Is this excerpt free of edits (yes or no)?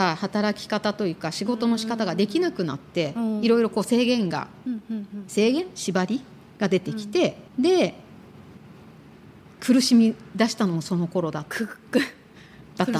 no